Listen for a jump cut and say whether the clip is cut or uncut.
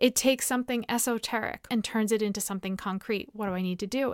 cut